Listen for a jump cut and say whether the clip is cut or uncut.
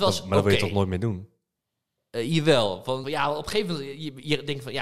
cut